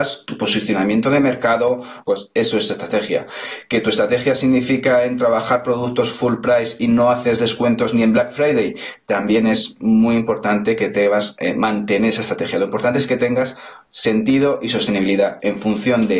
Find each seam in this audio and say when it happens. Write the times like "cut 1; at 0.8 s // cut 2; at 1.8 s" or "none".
cut 1; at 2.0 s